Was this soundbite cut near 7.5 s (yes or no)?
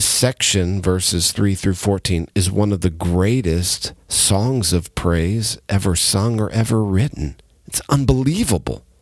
no